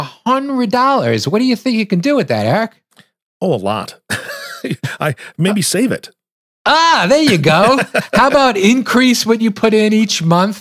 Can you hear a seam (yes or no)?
no